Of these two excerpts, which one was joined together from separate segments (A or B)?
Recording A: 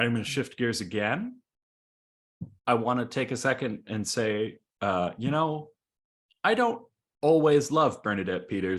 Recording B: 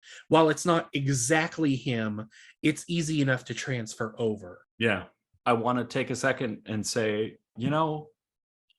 B